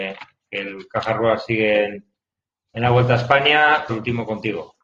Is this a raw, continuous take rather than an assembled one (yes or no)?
no